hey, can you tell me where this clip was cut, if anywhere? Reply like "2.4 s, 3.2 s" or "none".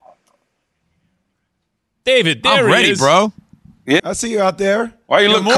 4.0 s